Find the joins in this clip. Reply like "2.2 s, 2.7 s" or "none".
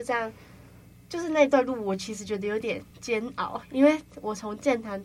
2.9 s

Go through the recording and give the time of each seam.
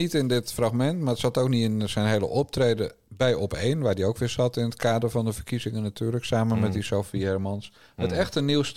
none

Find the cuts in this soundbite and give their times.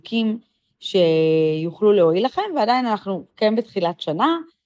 none

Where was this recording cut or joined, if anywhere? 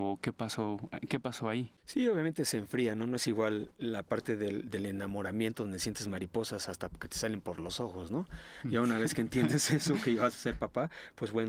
none

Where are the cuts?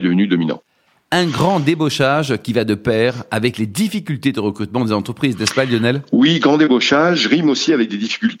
none

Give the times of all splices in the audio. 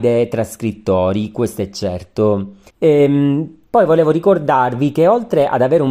2.7 s

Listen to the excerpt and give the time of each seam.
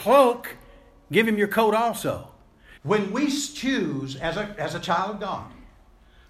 2.8 s

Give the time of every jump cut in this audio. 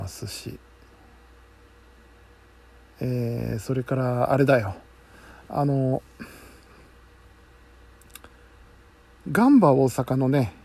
none

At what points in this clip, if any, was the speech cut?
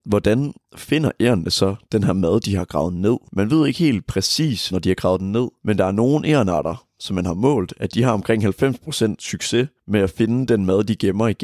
4.7 s

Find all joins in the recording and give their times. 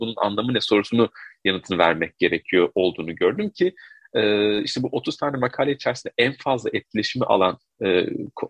none

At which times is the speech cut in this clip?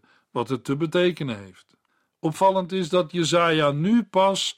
2.1 s

